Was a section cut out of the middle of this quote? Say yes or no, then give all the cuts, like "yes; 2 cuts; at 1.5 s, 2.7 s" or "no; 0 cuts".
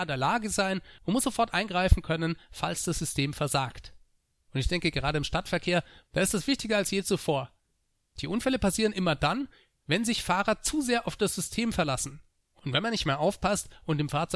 yes; 1 cut; at 6.0 s